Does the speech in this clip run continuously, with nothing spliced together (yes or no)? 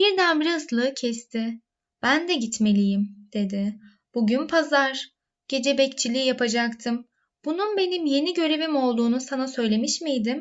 yes